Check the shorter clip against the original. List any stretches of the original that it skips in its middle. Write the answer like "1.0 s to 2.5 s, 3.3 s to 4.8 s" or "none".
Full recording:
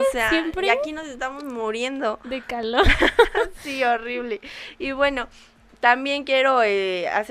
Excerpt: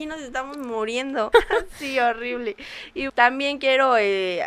2.2 s to 3.2 s, 4.9 s to 5.8 s